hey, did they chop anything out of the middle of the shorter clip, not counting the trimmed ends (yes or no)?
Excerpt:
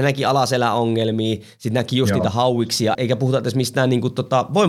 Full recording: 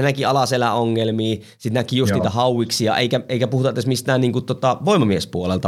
yes